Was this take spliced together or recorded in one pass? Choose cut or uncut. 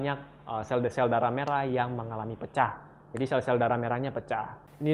uncut